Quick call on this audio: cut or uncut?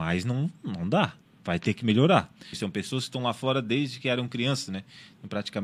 cut